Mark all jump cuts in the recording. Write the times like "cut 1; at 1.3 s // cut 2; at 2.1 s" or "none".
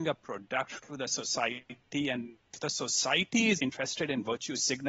cut 1; at 3.6 s